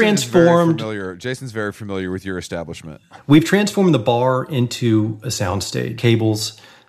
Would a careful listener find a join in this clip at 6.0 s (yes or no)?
yes